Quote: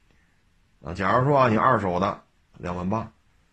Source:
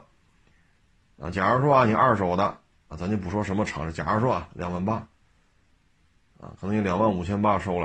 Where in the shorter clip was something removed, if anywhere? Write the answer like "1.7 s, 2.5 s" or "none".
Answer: 2.5 s